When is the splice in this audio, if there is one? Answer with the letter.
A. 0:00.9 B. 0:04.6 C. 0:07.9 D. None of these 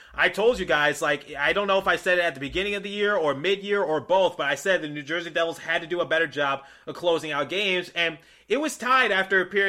D